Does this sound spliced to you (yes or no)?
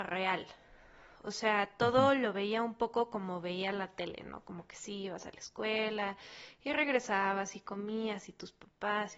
no